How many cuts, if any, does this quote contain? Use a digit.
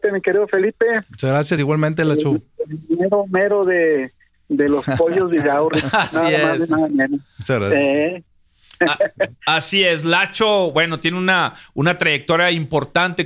0